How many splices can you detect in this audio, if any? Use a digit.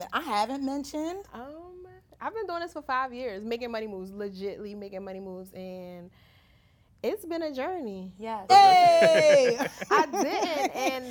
2